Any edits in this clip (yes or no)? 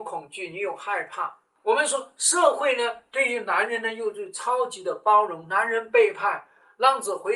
no